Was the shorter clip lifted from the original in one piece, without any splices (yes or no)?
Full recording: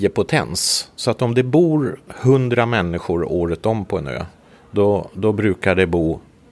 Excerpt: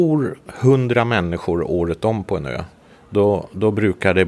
yes